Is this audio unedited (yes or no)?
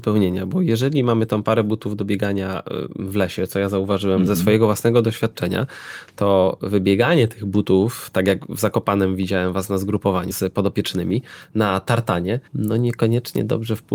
no